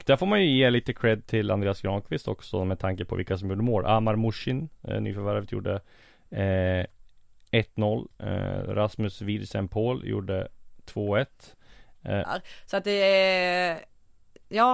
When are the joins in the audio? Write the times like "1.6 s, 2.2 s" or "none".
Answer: 12.2 s